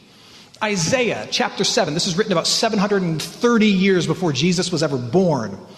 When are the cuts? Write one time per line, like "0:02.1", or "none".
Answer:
none